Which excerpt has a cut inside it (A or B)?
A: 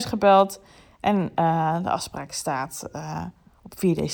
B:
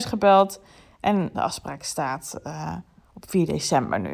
B